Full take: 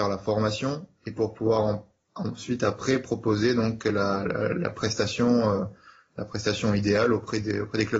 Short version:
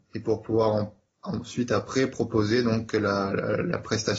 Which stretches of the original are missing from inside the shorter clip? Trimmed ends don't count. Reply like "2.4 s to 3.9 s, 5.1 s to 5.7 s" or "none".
none